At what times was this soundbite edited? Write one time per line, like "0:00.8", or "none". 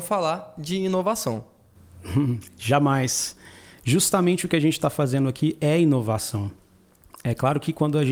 none